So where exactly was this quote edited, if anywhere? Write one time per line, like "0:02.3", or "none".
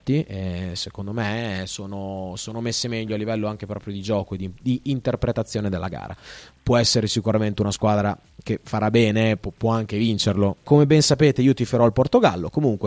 0:06.5
0:10.6